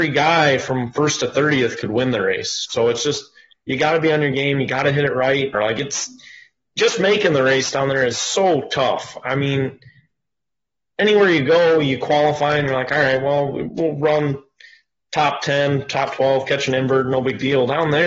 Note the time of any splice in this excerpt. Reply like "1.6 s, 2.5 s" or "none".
5.5 s

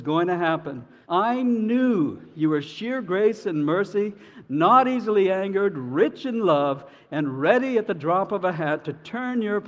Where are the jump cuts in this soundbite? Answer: 1.0 s

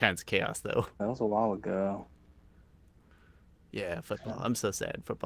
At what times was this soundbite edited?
1.0 s, 2.8 s

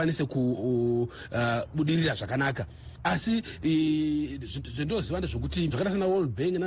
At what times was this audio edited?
5.7 s

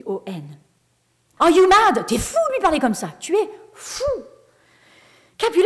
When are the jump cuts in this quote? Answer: 1.4 s

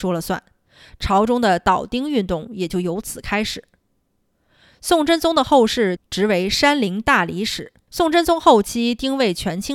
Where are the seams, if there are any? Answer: 6.0 s, 7.9 s

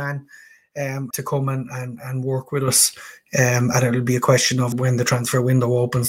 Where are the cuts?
1.1 s, 4.7 s

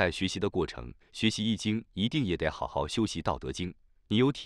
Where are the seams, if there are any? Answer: 1.0 s

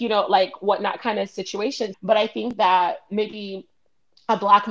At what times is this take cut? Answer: 1.9 s

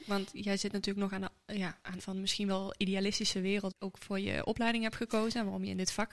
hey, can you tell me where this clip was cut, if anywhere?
2.0 s, 3.7 s

